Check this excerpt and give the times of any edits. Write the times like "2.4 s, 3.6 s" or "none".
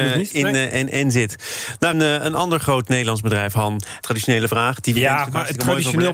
1.9 s, 4.0 s